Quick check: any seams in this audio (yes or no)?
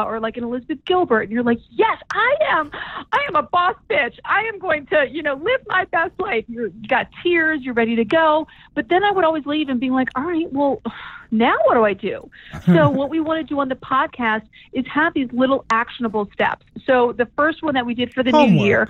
no